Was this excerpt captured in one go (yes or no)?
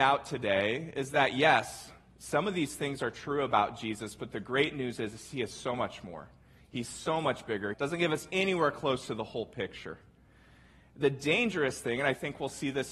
no